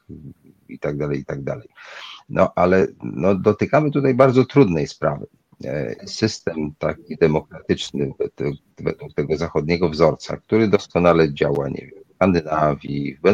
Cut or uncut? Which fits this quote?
cut